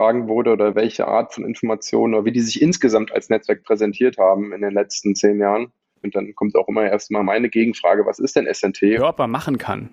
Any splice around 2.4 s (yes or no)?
no